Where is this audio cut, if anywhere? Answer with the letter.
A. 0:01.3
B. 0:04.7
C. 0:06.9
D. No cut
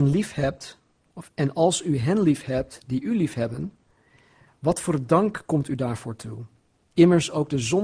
D